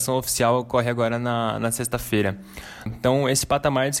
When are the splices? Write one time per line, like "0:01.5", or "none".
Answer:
0:02.9